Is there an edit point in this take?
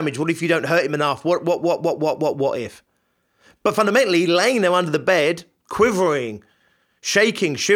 yes; 1 cut; at 1.6 s

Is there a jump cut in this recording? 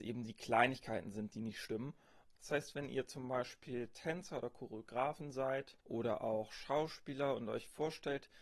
yes; 2 cuts; at 2.3 s, 5.8 s

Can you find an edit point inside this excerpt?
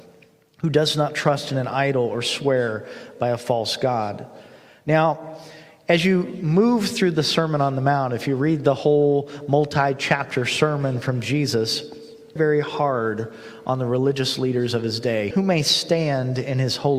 yes; 2 cuts; at 12.4 s, 15.3 s

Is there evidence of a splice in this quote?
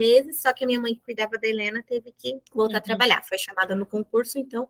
no; 0 cuts

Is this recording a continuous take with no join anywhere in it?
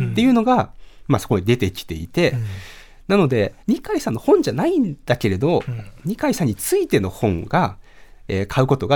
no; 1 cut; at 3.6 s

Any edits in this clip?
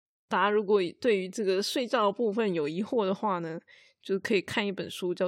no; 0 cuts

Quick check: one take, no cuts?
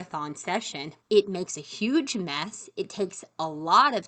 no; 1 cut; at 1.0 s

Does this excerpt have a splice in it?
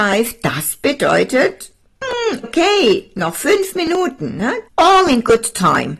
yes; 2 cuts; at 2.4 s, 4.7 s

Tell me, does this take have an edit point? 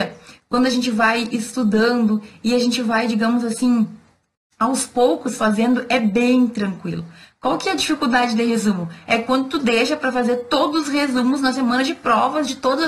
no; 0 cuts

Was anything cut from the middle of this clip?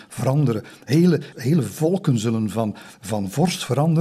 yes; 1 cut; at 1.3 s

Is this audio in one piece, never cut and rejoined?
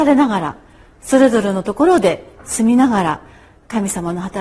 yes; 0 cuts

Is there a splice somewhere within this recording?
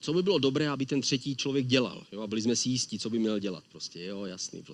no; 0 cuts

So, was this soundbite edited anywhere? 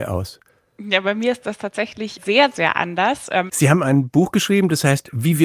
yes; 1 cut; at 3.5 s

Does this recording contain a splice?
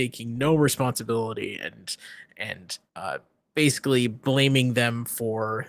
yes; 1 cut; at 2.9 s

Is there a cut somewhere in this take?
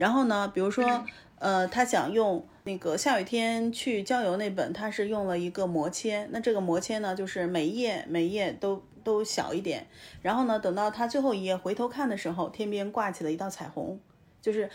no; 0 cuts

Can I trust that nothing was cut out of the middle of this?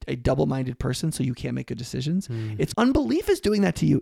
no; 1 cut; at 2.7 s

